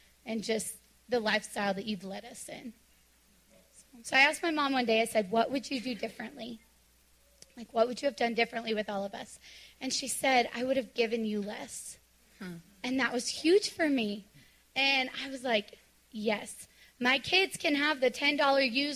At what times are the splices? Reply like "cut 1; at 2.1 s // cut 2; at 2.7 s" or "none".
cut 1; at 4.0 s